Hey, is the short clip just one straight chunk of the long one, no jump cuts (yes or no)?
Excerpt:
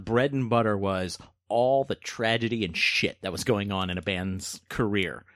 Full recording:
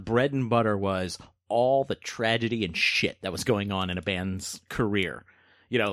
yes